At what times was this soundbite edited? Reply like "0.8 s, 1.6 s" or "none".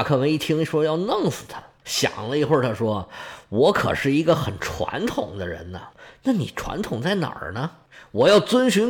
1.8 s